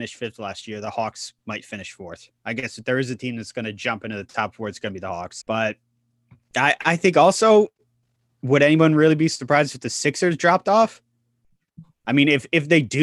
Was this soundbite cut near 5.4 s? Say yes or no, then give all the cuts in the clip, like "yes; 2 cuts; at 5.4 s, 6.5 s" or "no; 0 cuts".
yes; 1 cut; at 5.4 s